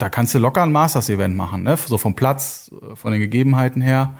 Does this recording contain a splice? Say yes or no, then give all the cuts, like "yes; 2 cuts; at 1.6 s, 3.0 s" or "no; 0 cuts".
no; 0 cuts